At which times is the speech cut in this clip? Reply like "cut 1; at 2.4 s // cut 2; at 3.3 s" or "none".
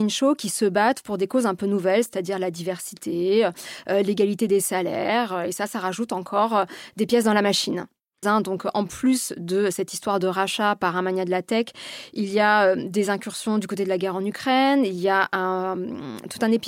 cut 1; at 8.2 s